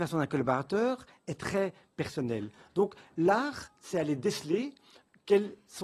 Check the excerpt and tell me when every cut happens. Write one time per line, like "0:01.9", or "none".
none

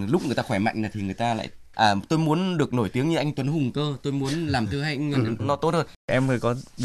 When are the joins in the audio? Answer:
0:05.4

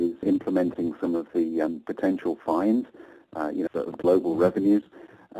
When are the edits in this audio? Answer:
0:03.7

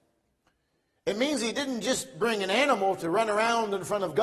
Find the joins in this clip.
none

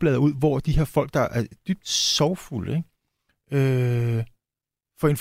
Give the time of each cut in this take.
none

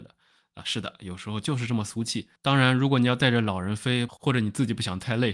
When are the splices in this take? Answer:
0:02.4
0:04.1

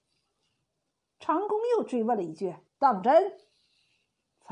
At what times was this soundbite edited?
0:02.7

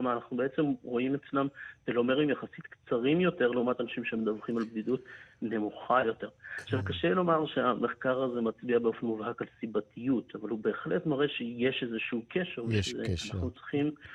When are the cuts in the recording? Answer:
none

